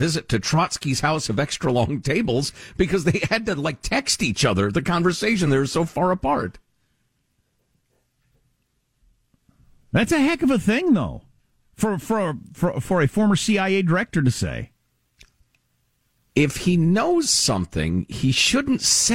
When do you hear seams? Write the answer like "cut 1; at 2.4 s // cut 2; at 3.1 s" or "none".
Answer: none